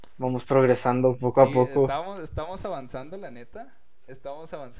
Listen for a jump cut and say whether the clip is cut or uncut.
uncut